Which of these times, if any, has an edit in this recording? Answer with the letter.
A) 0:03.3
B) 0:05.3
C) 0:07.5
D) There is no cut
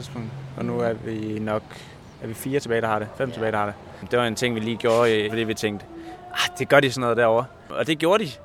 B